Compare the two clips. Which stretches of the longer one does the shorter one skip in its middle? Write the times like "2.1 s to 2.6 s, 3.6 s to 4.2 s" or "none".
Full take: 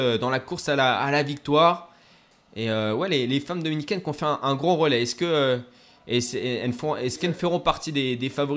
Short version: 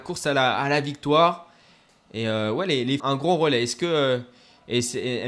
3.4 s to 4.4 s